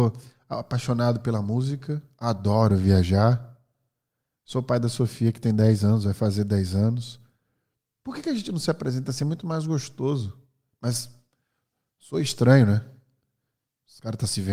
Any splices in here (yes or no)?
no